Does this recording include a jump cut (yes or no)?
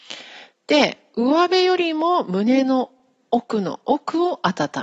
no